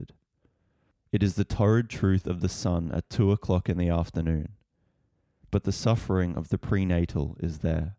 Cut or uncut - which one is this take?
cut